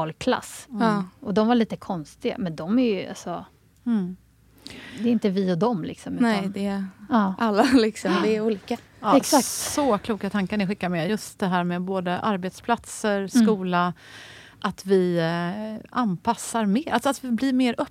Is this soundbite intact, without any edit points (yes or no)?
yes